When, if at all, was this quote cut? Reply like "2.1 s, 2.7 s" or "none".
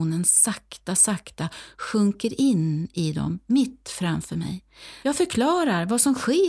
5.0 s